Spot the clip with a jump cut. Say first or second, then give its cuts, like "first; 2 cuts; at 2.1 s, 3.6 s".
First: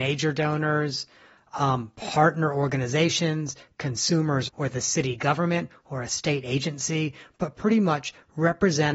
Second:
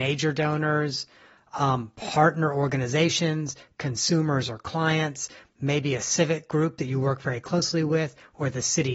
first; 1 cut; at 4.5 s